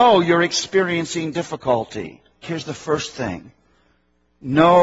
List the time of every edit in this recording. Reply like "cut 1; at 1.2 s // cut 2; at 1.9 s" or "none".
cut 1; at 2.4 s